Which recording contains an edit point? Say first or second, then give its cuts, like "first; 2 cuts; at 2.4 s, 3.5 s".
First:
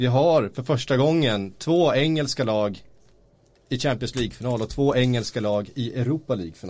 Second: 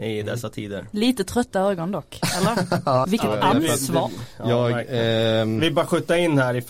second; 1 cut; at 3.0 s